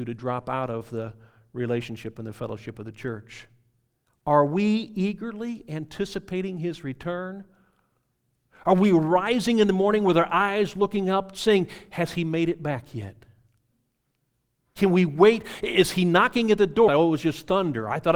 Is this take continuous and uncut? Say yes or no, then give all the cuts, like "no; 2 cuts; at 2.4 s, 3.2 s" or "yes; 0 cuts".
no; 2 cuts; at 4.1 s, 16.9 s